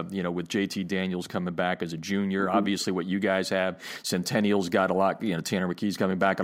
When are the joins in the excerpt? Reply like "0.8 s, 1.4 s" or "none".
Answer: none

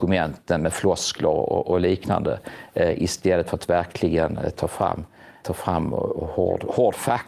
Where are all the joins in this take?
5.4 s

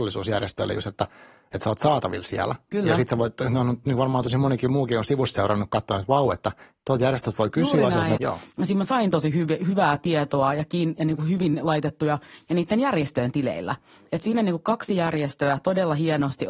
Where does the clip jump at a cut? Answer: 8.2 s

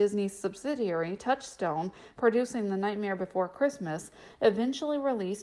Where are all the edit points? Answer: none

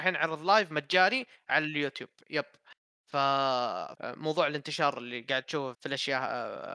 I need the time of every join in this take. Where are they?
3.9 s, 5.7 s

